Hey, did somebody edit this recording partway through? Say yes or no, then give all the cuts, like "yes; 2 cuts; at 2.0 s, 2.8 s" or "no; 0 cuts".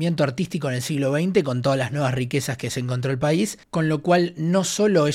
yes; 1 cut; at 3.6 s